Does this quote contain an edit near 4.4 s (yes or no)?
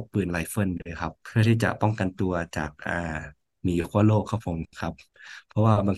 no